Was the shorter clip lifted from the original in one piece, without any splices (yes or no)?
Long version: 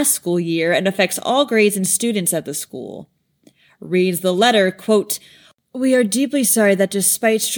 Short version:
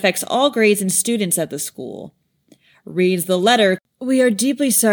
no